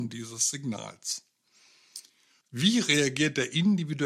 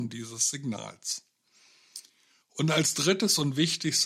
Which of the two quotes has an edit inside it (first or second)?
first